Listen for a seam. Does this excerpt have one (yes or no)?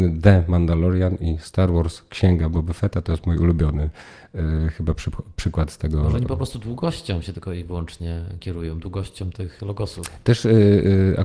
no